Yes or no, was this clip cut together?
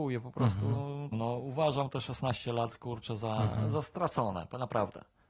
yes